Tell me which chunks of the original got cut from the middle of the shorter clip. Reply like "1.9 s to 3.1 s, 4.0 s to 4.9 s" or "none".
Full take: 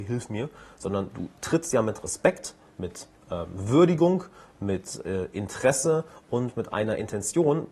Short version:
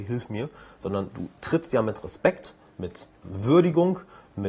3.2 s to 3.5 s